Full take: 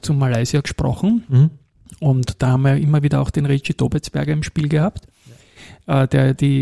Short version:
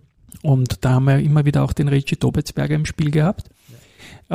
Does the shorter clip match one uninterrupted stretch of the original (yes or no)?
yes